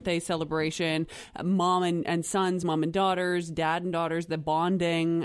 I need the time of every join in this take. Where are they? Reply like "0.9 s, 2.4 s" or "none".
none